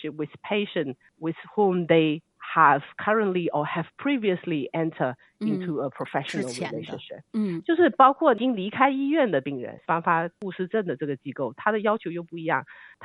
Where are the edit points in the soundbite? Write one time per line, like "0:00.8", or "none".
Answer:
0:09.8